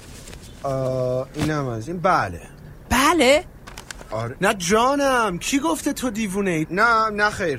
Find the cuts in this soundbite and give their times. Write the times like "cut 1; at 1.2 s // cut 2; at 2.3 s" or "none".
cut 1; at 4.4 s // cut 2; at 6.6 s